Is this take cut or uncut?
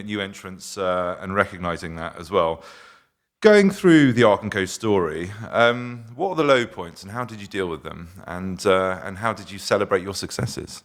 uncut